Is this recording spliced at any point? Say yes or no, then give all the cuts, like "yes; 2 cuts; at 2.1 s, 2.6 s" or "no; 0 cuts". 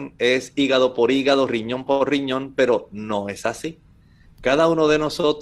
no; 0 cuts